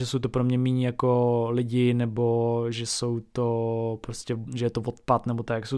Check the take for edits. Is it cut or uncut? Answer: uncut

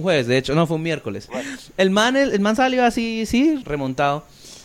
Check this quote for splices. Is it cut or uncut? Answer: cut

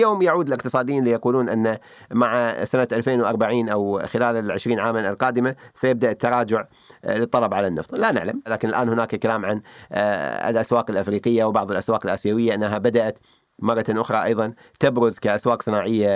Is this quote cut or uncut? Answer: uncut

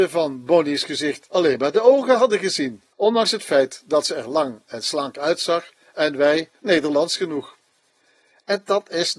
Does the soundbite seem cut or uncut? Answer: cut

